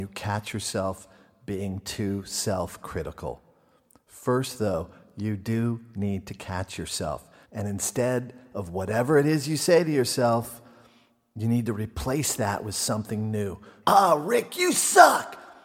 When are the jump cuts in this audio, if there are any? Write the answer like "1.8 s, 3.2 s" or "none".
7.4 s, 13.8 s